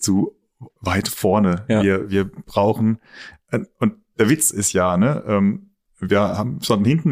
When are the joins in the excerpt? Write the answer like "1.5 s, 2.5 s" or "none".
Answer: none